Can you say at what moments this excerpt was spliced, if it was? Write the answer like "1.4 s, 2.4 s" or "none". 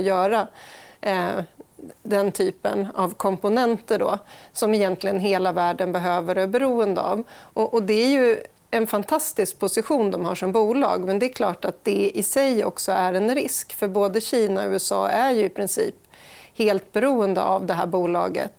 none